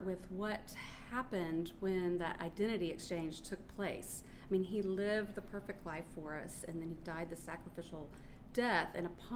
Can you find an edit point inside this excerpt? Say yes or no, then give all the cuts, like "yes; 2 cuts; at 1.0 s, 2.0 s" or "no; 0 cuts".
no; 0 cuts